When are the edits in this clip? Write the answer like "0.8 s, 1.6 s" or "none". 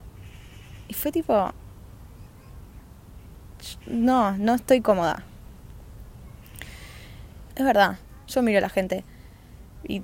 3.8 s, 7.5 s